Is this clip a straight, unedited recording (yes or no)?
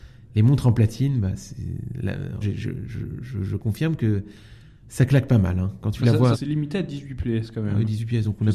no